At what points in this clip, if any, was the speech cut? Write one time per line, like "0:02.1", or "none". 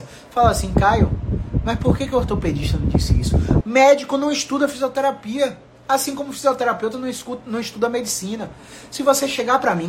0:03.6